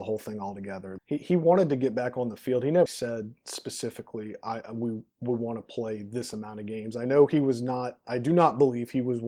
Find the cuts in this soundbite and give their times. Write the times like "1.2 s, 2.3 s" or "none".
1.0 s, 2.9 s